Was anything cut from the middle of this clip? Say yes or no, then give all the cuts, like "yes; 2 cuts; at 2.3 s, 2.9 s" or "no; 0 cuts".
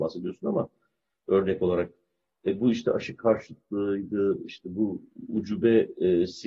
no; 0 cuts